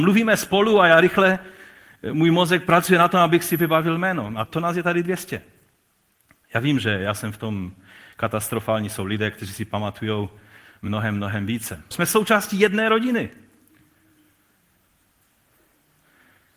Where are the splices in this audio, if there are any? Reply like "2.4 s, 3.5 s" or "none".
4.4 s, 11.9 s